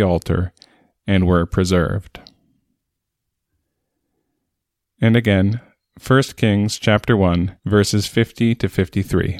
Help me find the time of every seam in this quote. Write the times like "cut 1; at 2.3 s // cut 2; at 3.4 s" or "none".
cut 1; at 7.6 s

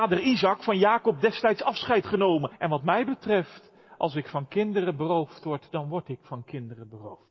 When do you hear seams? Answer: cut 1; at 2.5 s

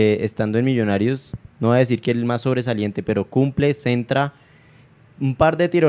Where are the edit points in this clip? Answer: cut 1; at 1.5 s

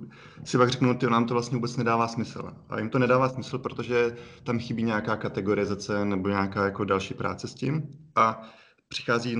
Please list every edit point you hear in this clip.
none

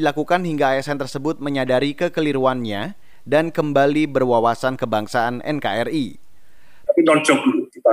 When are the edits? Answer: cut 1; at 6.9 s

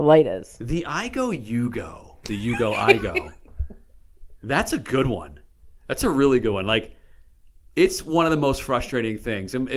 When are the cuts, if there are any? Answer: cut 1; at 2.2 s

